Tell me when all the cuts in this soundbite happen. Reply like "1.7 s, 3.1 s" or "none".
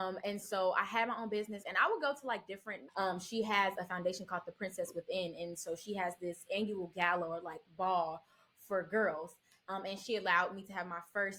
1.6 s, 2.9 s